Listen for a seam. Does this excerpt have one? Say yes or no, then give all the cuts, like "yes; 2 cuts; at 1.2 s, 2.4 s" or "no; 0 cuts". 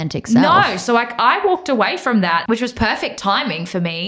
yes; 1 cut; at 2.5 s